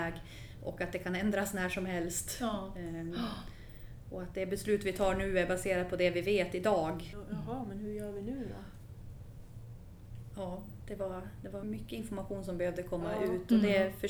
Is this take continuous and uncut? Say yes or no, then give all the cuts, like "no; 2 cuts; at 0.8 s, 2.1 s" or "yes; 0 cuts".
no; 2 cuts; at 7.1 s, 11.6 s